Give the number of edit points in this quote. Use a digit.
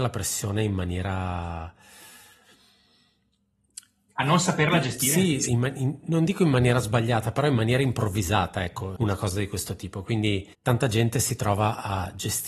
2